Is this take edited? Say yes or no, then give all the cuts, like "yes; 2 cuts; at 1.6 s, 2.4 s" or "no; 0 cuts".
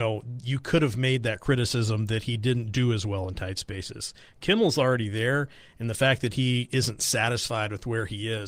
no; 0 cuts